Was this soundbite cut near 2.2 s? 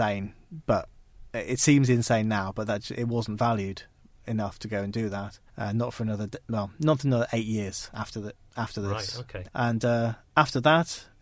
no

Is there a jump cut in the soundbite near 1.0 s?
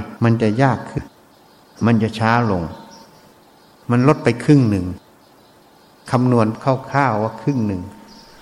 yes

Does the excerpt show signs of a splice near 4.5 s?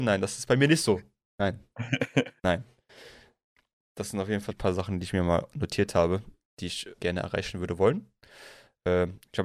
yes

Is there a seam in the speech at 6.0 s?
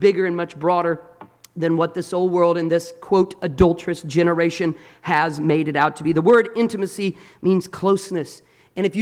no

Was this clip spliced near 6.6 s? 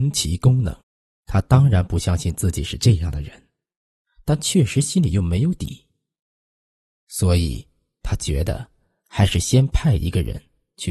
no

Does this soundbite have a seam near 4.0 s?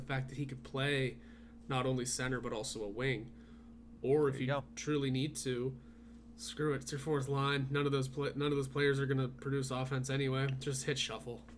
no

